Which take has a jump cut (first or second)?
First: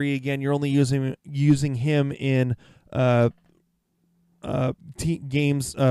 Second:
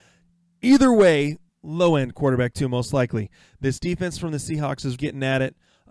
second